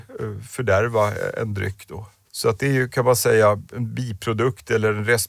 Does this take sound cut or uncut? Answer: cut